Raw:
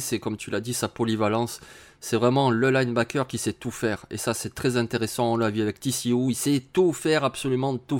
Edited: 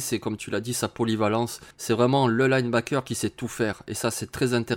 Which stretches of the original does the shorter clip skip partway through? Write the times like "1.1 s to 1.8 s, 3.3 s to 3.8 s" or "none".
1.7 s to 1.9 s